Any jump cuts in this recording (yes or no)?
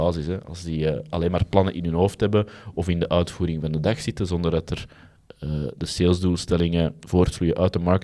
no